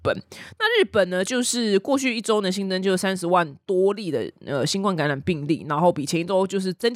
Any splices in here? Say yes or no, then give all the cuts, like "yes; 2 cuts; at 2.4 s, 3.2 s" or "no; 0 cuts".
no; 0 cuts